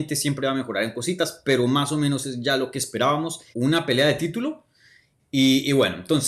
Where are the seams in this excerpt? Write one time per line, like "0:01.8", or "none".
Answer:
0:03.5
0:05.2